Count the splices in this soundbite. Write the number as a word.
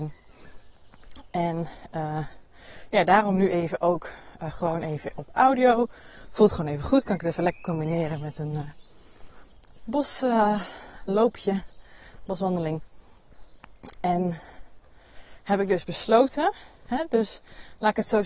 zero